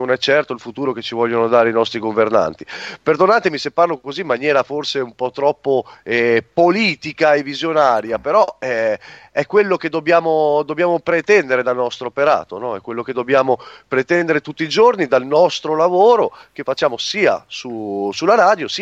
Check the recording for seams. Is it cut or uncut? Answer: uncut